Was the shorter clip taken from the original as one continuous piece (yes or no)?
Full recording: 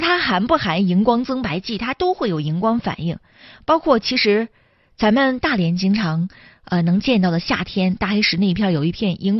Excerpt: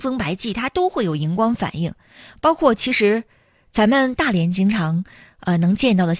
yes